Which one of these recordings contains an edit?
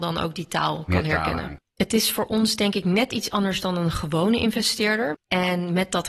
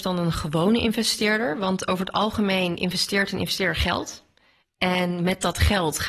first; 2 cuts; at 1.6 s, 5.1 s

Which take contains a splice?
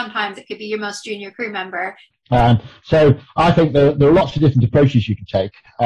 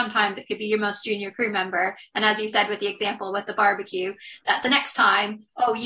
first; 1 cut; at 2.1 s

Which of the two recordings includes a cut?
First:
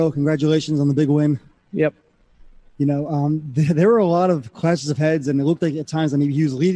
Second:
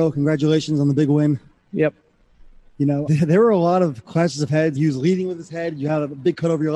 second; 2 cuts; at 3.1 s, 4.8 s

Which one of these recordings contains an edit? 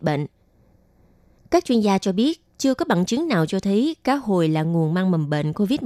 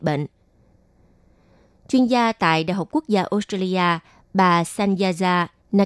first; 1 cut; at 1.4 s

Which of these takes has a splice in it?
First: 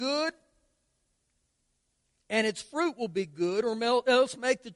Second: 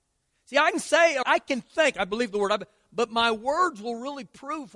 second; 1 cut; at 1.2 s

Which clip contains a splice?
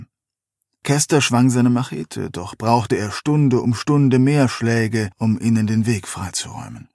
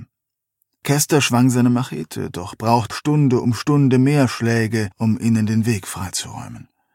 second; 1 cut; at 2.9 s

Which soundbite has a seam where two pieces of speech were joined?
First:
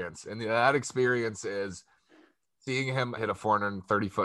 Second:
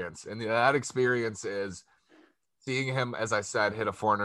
first; 1 cut; at 3.2 s

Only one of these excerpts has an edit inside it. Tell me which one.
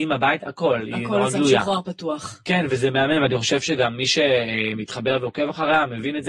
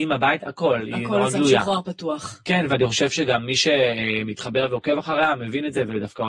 second; 1 cut; at 2.7 s

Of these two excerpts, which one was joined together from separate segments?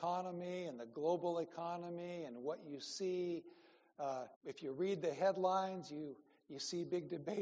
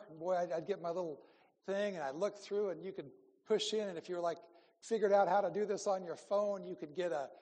first; 1 cut; at 4.3 s

